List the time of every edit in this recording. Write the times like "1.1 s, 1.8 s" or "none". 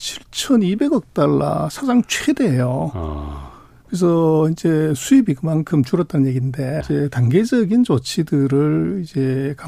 6.8 s